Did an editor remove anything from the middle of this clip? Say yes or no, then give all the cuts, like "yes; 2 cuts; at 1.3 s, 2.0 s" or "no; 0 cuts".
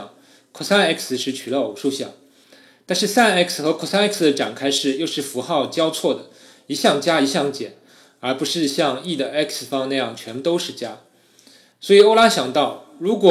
no; 0 cuts